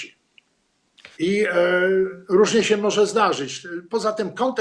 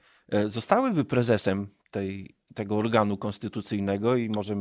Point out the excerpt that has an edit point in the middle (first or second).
first